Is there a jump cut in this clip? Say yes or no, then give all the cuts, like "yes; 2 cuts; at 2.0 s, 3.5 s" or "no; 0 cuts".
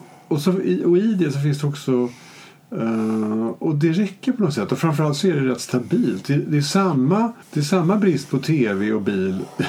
yes; 1 cut; at 7.4 s